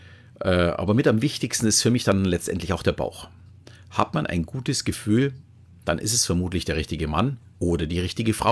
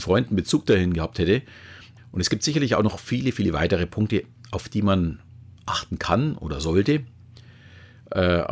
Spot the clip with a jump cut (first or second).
second